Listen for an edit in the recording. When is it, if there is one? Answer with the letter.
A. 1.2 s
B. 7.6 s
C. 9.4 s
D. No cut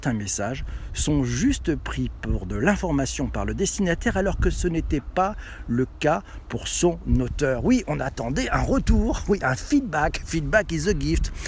D